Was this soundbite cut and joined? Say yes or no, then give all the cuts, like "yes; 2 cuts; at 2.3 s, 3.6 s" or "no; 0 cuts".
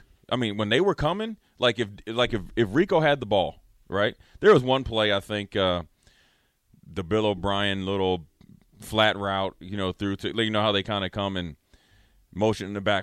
no; 0 cuts